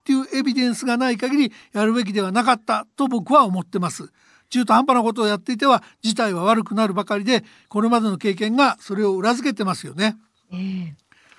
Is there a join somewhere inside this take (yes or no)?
no